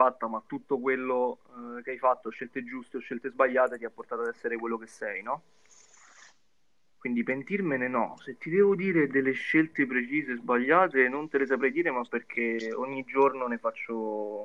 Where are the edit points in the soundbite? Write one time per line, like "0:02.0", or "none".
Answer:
none